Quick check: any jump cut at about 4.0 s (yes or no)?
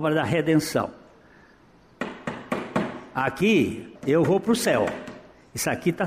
yes